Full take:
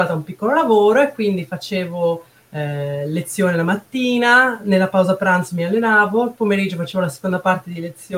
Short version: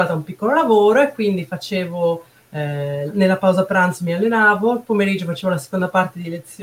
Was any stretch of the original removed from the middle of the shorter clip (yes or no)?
yes